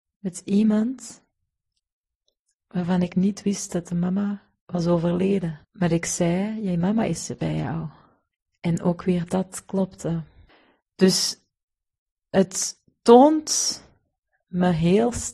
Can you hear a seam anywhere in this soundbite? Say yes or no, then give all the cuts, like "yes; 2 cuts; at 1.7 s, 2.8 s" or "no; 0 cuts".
yes; 2 cuts; at 4.6 s, 5.6 s